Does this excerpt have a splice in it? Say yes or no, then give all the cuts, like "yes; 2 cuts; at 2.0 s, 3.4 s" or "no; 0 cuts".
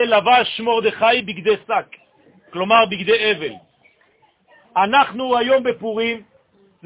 yes; 1 cut; at 4.6 s